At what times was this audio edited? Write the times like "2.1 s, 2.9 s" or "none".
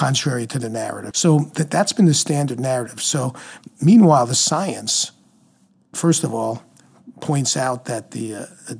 1.1 s